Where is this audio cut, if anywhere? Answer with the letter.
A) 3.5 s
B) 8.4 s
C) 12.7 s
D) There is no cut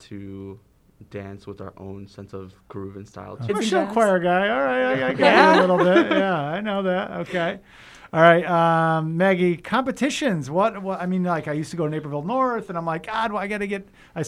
A